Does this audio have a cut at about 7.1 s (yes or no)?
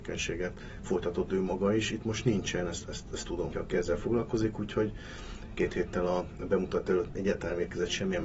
yes